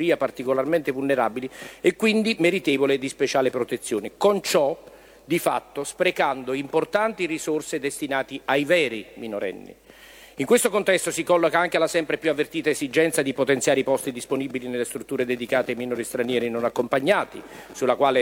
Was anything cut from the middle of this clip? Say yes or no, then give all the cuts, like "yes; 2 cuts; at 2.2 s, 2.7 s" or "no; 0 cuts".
no; 0 cuts